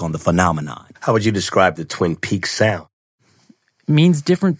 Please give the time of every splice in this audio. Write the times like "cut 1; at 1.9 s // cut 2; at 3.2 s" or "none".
cut 1; at 1.0 s